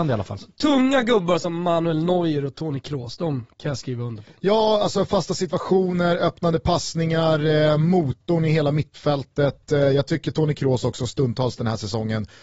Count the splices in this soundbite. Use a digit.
0